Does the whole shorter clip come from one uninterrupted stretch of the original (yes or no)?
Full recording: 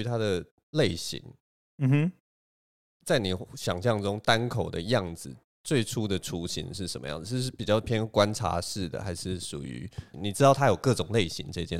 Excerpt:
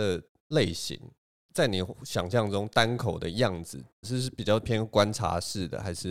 no